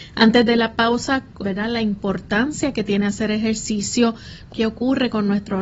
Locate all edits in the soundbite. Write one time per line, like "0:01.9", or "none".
0:01.4
0:04.5